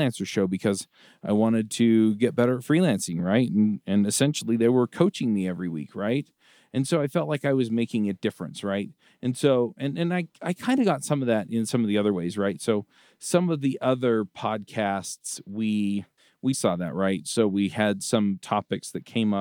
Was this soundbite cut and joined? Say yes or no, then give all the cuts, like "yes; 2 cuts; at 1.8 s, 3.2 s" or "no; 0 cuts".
yes; 2 cuts; at 6.7 s, 16.5 s